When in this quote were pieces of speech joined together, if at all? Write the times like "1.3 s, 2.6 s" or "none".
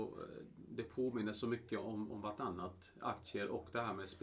none